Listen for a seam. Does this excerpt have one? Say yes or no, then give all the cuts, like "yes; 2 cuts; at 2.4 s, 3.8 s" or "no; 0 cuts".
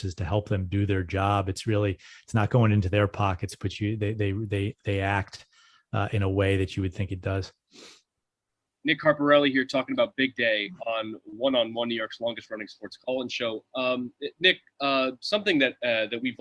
no; 0 cuts